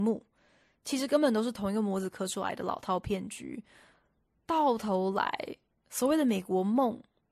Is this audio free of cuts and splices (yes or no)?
yes